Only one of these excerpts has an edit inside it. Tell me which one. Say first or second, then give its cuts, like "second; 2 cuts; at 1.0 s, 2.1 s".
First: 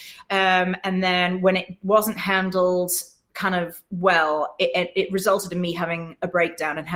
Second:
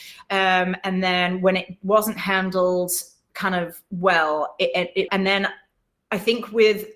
second; 1 cut; at 5.1 s